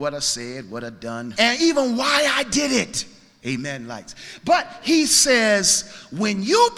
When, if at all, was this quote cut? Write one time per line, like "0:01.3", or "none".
0:01.3
0:03.4